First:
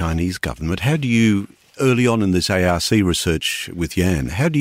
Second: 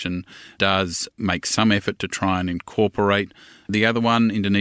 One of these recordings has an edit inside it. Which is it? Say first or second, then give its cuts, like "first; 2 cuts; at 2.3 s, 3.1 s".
second; 1 cut; at 3.6 s